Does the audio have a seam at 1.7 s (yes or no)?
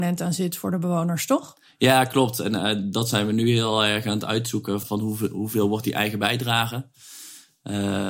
no